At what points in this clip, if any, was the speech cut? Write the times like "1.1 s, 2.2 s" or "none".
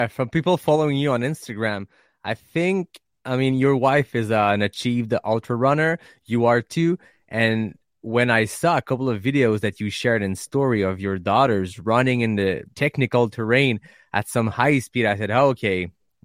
12.7 s